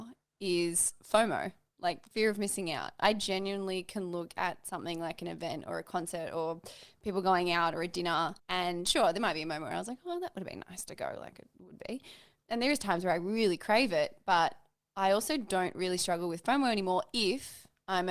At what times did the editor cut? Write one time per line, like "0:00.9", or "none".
0:08.4